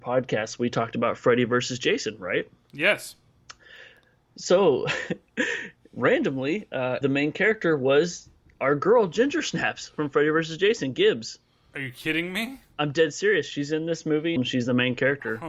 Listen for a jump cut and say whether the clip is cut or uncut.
cut